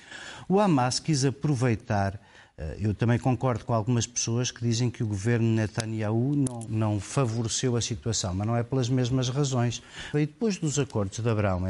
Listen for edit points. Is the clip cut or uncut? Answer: cut